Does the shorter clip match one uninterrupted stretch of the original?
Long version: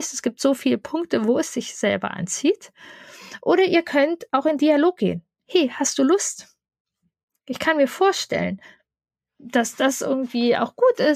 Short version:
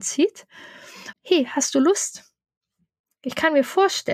no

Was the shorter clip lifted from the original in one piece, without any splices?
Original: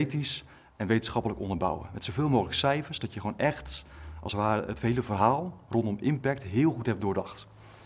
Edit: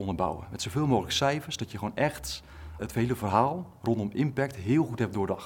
no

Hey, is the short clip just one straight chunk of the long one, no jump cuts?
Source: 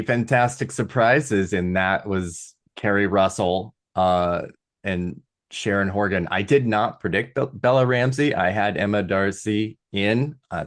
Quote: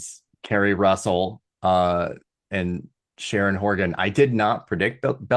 yes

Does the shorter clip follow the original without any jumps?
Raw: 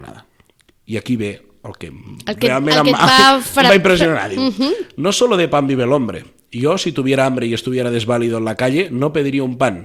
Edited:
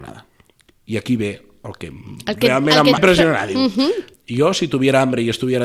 no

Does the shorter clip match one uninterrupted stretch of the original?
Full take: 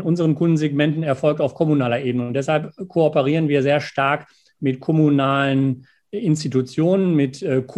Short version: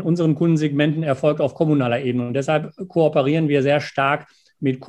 yes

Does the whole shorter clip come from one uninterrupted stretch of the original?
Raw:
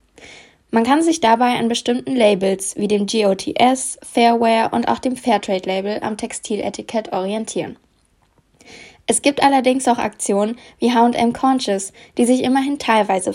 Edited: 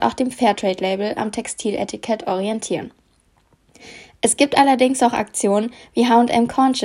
yes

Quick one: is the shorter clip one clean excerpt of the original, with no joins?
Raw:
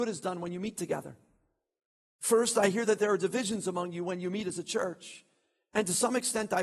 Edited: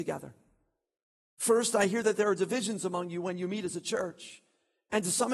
yes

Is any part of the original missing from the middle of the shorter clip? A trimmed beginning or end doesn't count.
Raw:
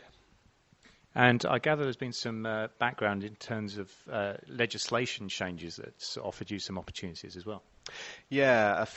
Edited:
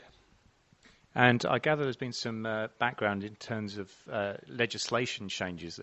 no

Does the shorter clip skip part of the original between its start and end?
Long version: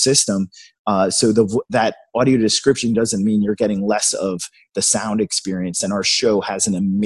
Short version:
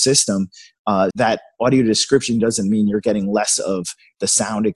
yes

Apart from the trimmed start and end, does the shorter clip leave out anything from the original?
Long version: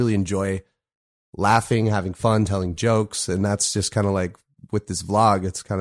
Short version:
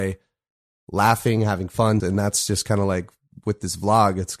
yes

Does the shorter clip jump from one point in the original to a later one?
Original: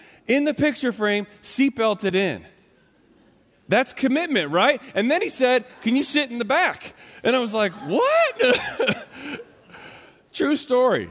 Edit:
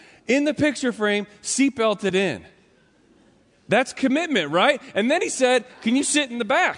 no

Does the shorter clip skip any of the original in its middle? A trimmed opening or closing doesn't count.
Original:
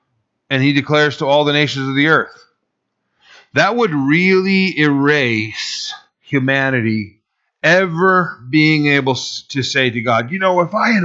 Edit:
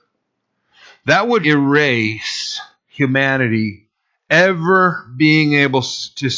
yes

